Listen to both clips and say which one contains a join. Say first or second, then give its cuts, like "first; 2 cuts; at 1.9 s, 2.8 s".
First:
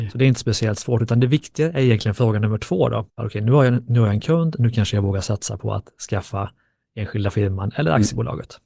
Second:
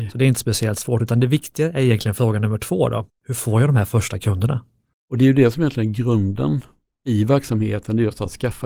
first; 1 cut; at 3.2 s